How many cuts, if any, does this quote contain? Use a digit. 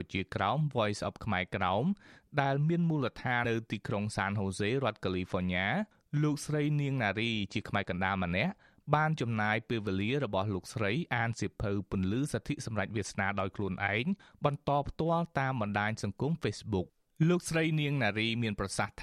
1